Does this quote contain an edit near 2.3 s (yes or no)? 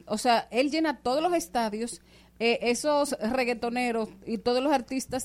no